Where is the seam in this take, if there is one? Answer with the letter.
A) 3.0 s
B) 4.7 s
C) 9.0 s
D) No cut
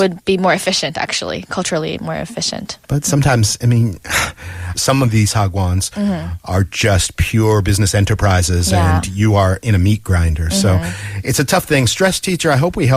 B